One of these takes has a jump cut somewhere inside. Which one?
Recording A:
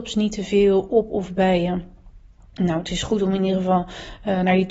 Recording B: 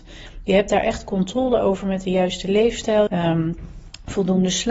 B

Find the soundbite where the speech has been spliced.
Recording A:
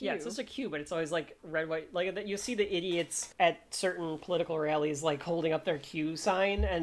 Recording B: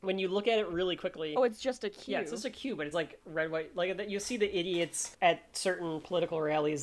B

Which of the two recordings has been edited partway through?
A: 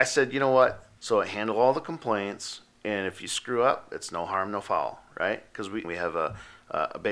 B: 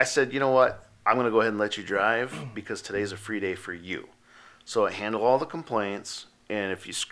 A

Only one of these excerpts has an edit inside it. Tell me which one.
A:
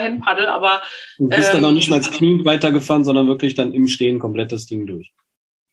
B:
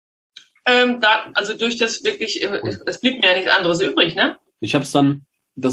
B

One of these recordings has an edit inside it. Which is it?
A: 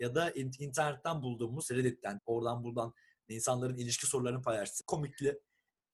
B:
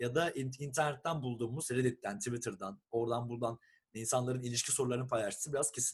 A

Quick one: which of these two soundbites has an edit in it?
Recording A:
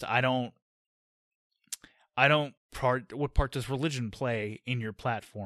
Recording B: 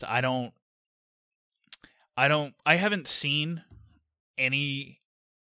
A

